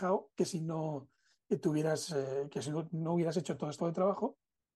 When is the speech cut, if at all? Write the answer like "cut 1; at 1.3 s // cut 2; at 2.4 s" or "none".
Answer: cut 1; at 3.8 s